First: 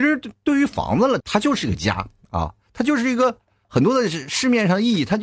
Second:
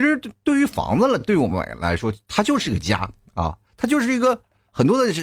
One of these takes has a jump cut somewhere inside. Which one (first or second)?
first